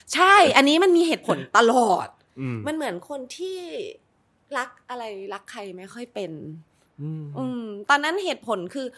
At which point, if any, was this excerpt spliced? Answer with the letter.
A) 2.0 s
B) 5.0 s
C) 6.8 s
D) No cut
D